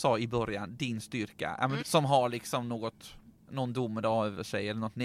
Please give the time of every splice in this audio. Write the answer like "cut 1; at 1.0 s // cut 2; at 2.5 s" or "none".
cut 1; at 1.8 s